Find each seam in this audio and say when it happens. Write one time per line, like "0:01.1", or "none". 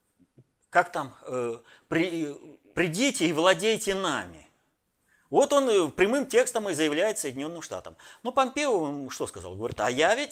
0:02.7